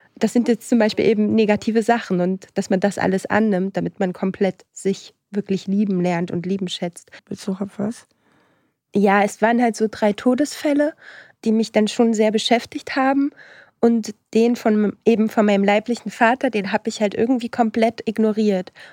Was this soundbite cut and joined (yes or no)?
yes